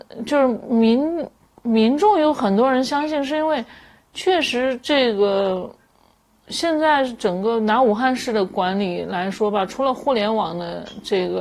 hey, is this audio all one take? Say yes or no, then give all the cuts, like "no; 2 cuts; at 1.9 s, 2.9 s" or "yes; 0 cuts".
yes; 0 cuts